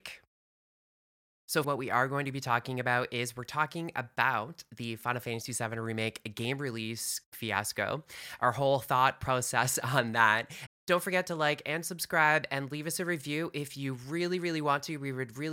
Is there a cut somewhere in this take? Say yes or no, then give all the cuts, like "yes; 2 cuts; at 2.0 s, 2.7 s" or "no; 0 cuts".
yes; 2 cuts; at 1.6 s, 10.7 s